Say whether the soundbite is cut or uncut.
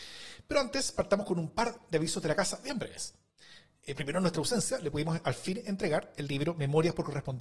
uncut